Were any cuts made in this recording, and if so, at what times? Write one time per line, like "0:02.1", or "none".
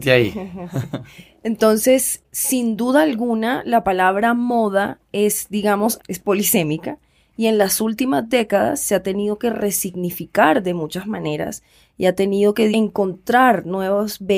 0:06.0
0:12.7